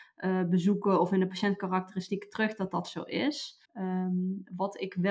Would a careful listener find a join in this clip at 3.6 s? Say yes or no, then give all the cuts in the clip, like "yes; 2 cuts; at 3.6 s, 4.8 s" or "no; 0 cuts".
yes; 1 cut; at 3.6 s